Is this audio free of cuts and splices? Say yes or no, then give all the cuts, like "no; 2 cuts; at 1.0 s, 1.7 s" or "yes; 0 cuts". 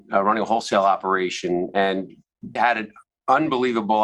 no; 1 cut; at 2.6 s